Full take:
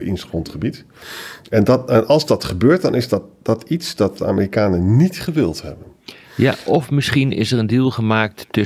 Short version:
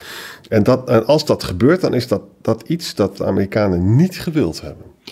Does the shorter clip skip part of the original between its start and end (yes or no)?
no